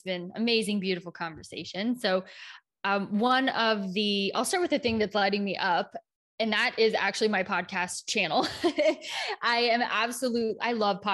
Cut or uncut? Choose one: uncut